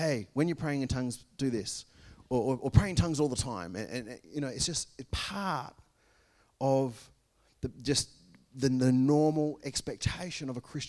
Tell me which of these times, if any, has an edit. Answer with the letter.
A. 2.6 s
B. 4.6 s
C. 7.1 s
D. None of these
D